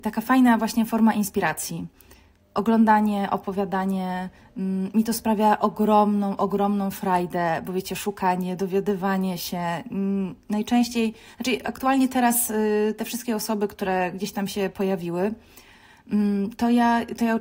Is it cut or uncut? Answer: uncut